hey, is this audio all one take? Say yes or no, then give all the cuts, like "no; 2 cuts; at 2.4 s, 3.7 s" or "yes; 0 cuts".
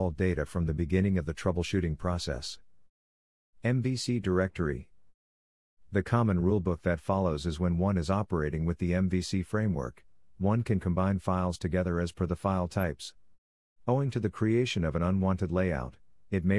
yes; 0 cuts